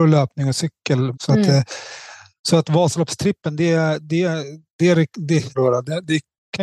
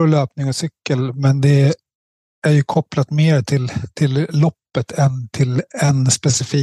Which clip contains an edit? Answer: first; 2 cuts; at 1.1 s, 5.6 s

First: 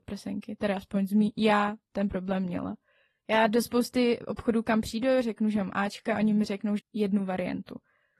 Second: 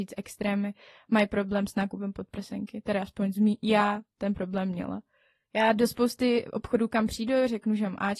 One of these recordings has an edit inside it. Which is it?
first; 1 cut; at 6.8 s

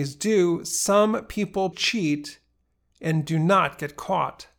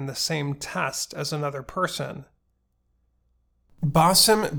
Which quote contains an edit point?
first; 1 cut; at 1.7 s

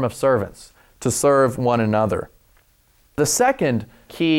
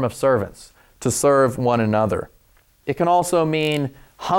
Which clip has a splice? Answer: second; 1 cut; at 2.8 s

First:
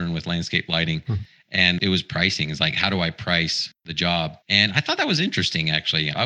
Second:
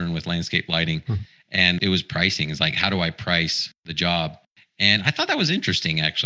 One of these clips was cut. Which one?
first; 1 cut; at 4.4 s

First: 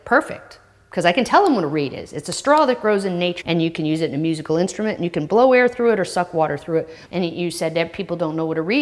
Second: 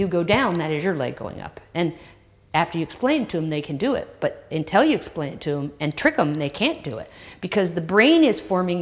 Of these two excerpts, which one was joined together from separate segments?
first; 2 cuts; at 3.4 s, 7.0 s

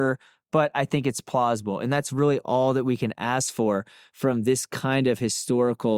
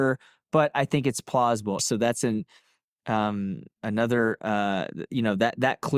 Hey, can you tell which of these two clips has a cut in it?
second; 1 cut; at 1.8 s

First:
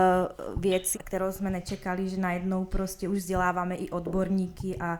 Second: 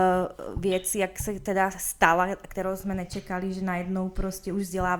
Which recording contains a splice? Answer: first; 1 cut; at 0.9 s

